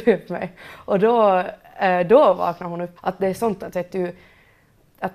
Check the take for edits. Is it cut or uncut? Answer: cut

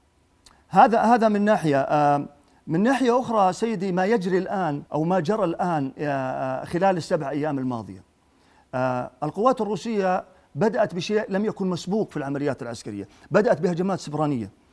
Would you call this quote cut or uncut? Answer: cut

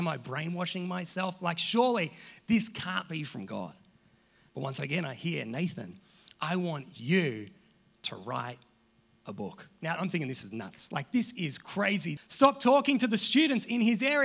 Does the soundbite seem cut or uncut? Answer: cut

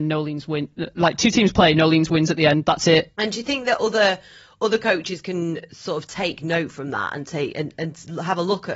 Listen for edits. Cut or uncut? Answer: uncut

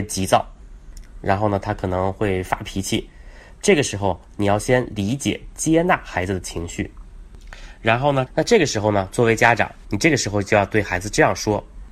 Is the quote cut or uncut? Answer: cut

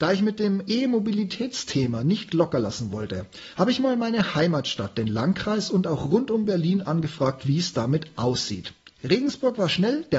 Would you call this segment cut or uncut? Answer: uncut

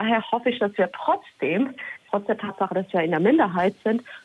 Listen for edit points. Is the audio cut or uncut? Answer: uncut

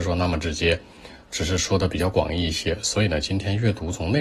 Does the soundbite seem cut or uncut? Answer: uncut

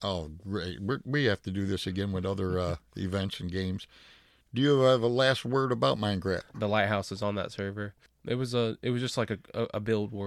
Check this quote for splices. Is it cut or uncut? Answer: cut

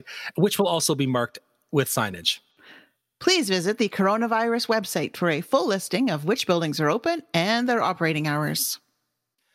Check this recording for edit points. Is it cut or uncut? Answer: uncut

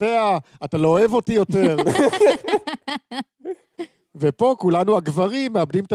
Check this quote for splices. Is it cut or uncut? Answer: uncut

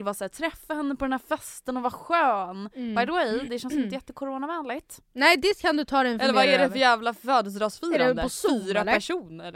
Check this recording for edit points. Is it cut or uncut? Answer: uncut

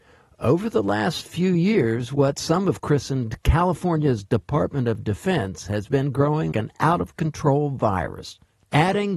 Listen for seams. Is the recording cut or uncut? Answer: cut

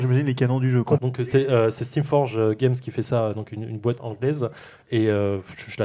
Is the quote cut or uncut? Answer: cut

